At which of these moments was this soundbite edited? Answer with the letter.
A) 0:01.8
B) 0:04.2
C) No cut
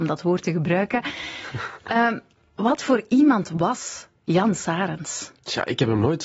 B